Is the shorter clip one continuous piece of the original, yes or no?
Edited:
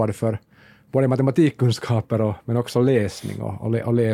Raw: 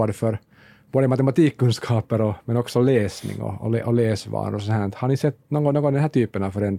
yes